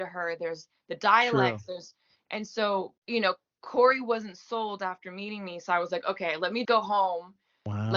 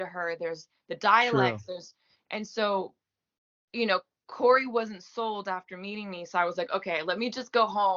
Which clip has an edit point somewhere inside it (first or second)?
first